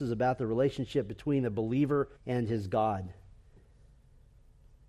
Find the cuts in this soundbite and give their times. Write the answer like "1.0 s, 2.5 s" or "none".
2.2 s